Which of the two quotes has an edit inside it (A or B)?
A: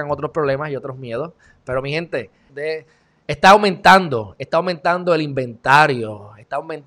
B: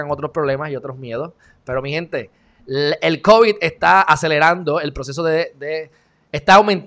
A